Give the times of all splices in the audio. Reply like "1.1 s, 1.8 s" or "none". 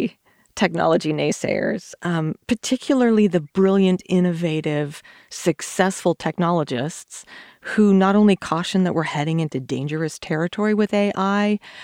none